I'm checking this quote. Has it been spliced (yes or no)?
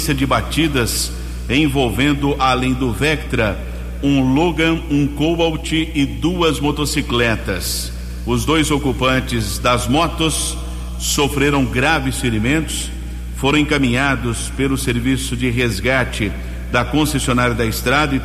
no